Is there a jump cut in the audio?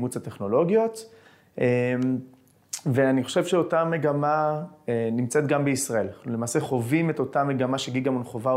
no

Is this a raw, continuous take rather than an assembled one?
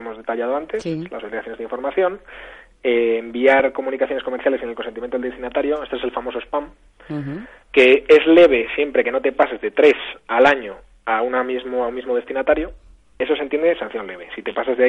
no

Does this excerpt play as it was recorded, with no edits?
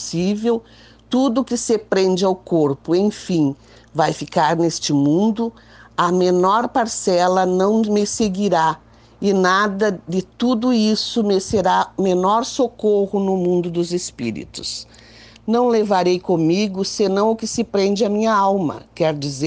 no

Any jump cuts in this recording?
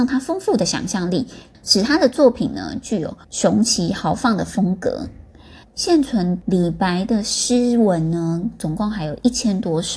yes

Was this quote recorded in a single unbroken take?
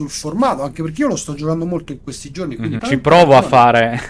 no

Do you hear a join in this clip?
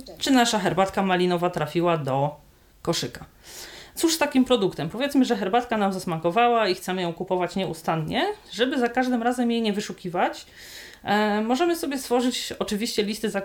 yes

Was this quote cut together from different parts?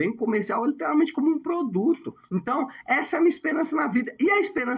yes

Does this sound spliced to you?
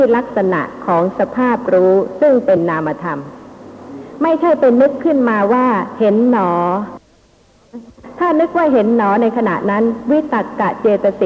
no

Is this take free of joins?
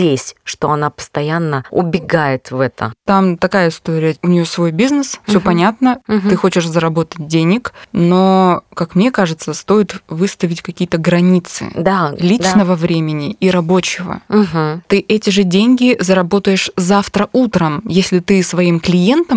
yes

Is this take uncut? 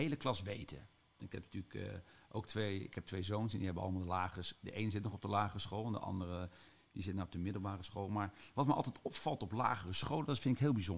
no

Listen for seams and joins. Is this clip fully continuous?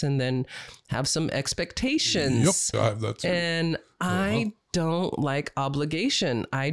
no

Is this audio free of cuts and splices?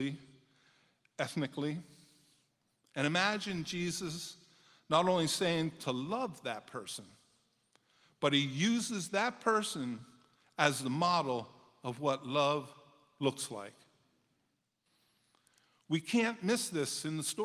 yes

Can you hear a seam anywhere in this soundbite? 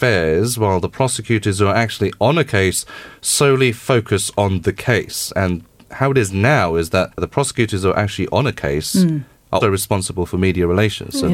yes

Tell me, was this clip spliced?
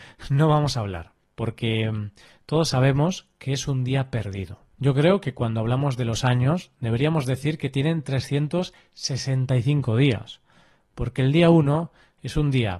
yes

